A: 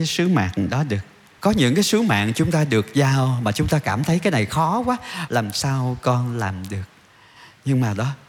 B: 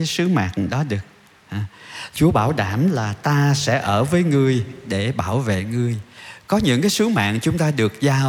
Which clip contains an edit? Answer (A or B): A